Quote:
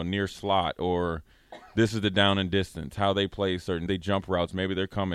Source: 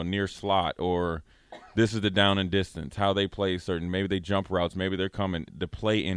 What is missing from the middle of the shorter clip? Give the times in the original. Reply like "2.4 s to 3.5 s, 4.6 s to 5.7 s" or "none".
3.9 s to 4.1 s